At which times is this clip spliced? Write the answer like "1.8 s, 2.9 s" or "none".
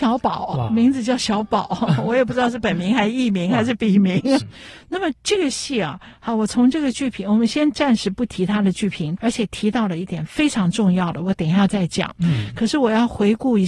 4.4 s, 9.2 s